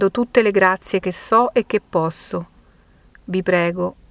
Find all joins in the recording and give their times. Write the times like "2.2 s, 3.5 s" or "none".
none